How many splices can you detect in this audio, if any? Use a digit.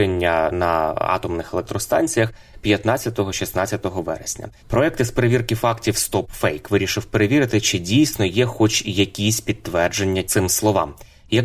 1